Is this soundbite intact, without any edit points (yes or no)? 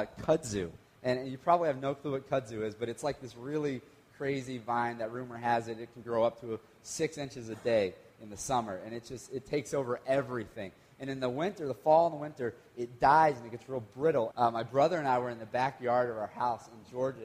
no